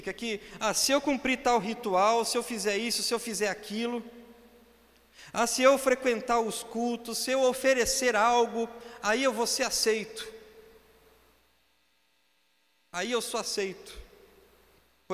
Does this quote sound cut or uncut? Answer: uncut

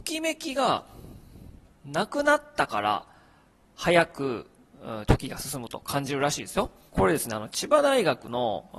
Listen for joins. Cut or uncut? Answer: cut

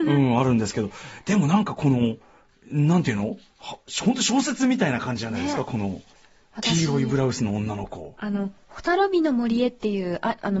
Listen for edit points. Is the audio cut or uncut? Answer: uncut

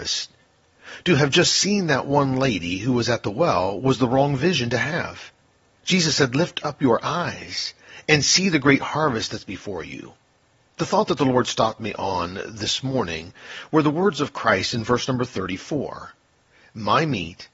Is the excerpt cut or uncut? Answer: uncut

